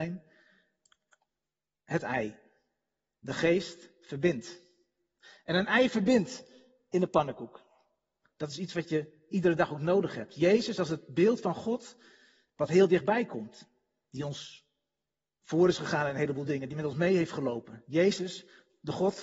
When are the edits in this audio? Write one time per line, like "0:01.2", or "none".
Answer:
0:08.2